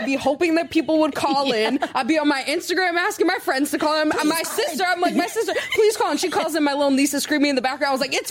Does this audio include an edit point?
no; 0 cuts

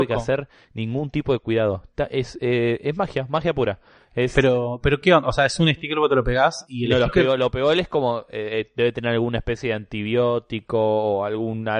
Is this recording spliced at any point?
no; 0 cuts

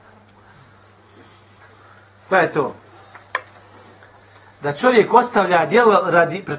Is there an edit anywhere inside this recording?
no; 0 cuts

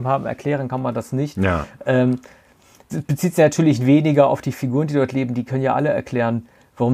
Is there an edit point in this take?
no; 0 cuts

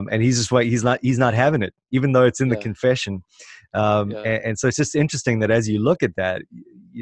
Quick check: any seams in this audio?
no; 0 cuts

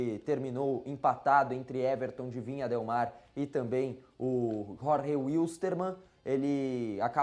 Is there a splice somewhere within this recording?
no; 0 cuts

